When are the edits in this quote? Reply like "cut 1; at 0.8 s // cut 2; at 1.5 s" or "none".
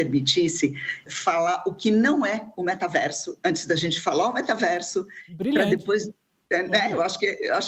cut 1; at 1.1 s